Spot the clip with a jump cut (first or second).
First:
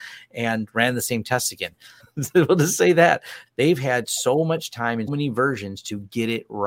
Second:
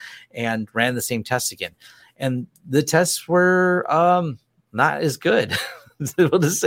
first